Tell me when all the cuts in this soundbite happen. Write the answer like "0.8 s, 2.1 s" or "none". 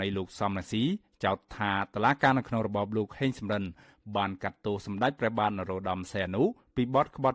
none